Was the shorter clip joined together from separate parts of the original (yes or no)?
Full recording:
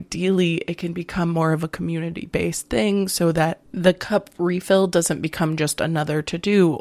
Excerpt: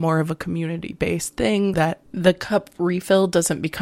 yes